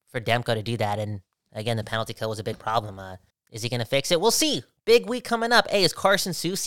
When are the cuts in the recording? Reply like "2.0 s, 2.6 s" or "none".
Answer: 3.3 s, 4.8 s